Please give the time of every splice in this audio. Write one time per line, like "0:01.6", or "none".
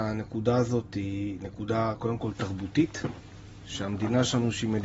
none